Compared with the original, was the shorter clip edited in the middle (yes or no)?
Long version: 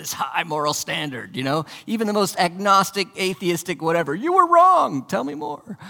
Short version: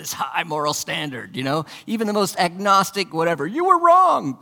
yes